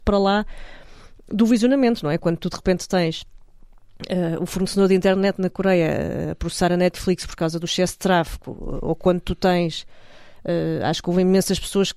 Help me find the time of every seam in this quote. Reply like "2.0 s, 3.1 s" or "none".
none